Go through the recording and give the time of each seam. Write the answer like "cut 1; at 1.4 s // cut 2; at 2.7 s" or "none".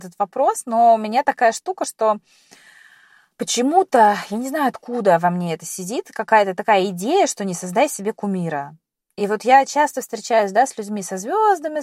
none